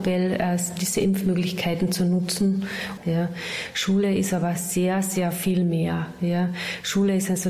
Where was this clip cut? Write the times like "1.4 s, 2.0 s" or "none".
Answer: 3.0 s